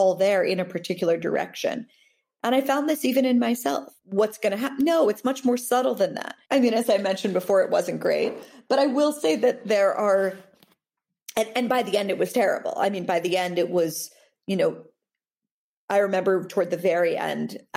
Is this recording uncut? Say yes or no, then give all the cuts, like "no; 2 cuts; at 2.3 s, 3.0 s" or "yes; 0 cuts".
no; 2 cuts; at 4.0 s, 6.4 s